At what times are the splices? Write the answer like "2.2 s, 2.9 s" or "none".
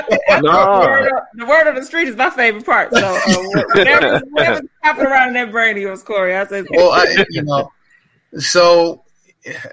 6.6 s